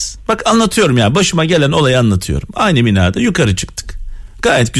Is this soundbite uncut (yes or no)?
yes